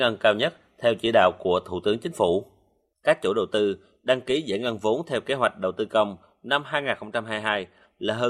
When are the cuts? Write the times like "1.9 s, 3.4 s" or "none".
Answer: 2.9 s